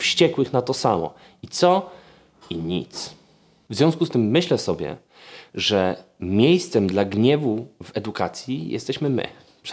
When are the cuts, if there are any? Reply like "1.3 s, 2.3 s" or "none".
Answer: none